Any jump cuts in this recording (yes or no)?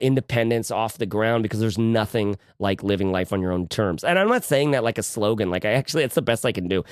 no